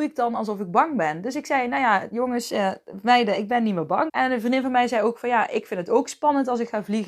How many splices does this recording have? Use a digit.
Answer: 1